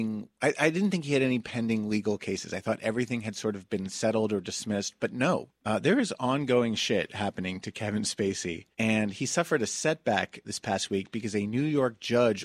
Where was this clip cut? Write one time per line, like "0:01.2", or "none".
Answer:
0:05.5
0:08.7
0:10.4